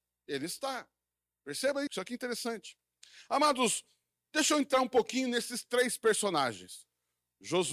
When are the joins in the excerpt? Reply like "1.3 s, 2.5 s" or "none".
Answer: 1.9 s